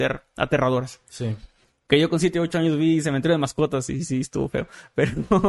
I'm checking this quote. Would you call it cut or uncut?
uncut